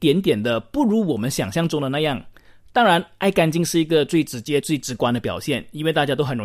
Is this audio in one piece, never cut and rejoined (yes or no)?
yes